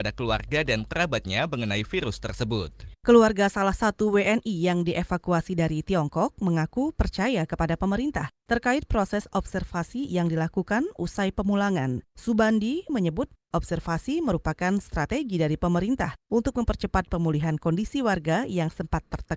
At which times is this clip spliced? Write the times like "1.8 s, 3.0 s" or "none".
12.9 s